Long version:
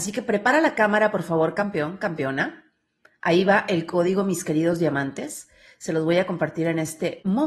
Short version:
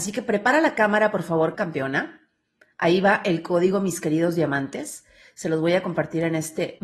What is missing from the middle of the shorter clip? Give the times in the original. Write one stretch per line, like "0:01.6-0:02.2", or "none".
0:01.5-0:02.0